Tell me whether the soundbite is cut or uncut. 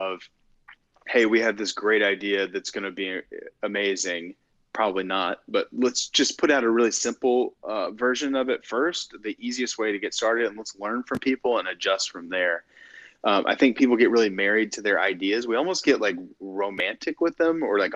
uncut